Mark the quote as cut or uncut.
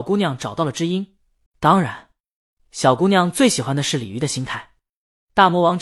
cut